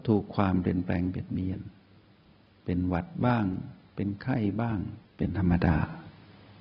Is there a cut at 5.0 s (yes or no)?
yes